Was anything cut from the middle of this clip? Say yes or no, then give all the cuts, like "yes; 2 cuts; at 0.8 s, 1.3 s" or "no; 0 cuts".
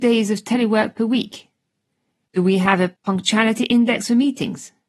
yes; 1 cut; at 2.3 s